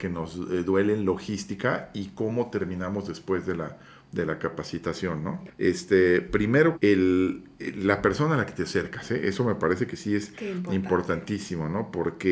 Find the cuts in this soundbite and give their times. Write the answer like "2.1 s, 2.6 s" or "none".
5.5 s, 6.7 s